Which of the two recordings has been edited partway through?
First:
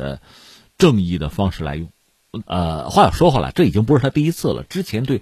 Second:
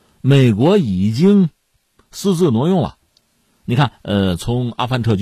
first; 1 cut; at 2.4 s

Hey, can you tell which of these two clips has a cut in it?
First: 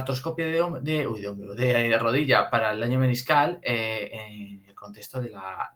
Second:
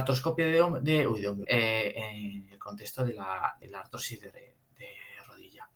second; 2 cuts; at 1.4 s, 3.6 s

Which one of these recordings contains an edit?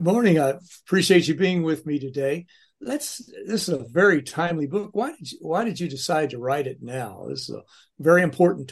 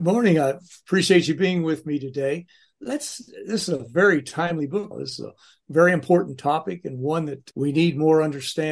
second; 2 cuts; at 4.9 s, 7.5 s

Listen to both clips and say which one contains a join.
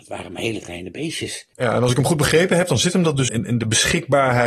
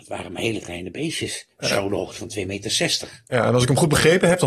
first; 2 cuts; at 1.5 s, 3.3 s

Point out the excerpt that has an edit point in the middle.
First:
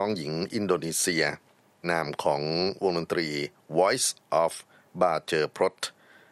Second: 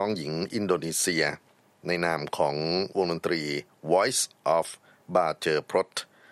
first; 1 cut; at 1.8 s

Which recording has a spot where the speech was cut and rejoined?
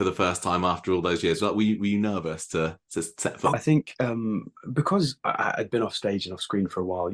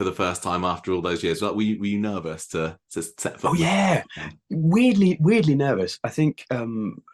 first; 1 cut; at 3.5 s

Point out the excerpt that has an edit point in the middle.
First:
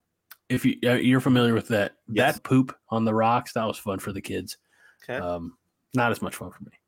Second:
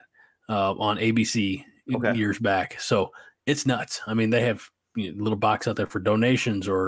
first; 1 cut; at 2.3 s

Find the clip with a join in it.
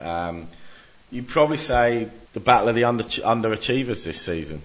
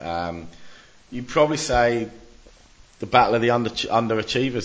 first; 1 cut; at 2.2 s

